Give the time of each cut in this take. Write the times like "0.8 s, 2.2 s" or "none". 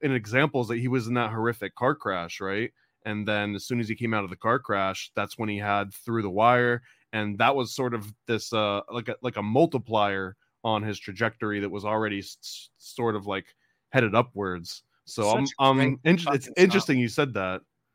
none